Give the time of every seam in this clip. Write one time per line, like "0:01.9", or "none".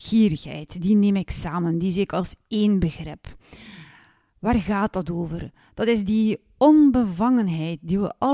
none